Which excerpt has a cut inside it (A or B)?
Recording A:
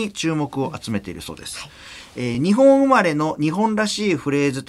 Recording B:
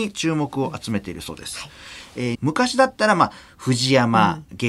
B